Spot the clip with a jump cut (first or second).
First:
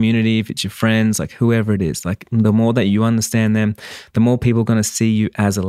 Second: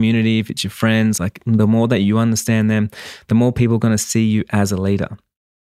second